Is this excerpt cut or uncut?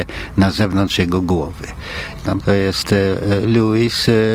cut